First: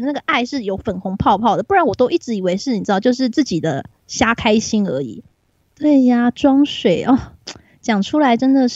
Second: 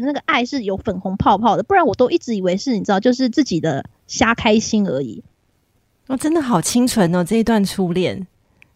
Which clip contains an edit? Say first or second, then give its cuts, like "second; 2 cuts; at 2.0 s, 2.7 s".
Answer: first; 1 cut; at 5.6 s